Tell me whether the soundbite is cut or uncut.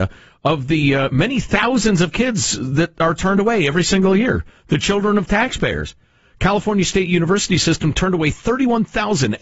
uncut